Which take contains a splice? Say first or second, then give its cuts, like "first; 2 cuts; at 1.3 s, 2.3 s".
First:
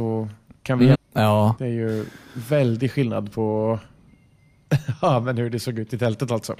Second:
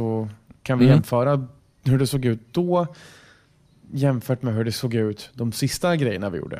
first; 1 cut; at 0.9 s